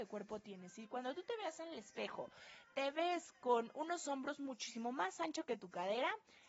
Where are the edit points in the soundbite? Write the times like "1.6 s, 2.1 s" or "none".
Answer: none